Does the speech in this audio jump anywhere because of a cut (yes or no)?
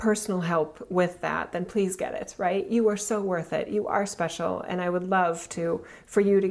no